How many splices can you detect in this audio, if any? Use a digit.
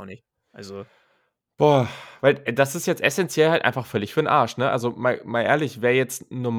0